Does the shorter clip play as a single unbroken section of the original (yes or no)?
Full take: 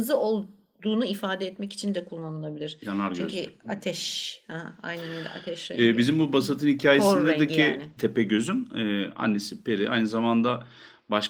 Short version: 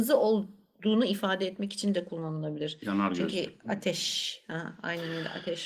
yes